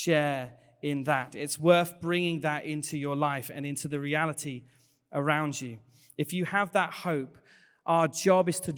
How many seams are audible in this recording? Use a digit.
0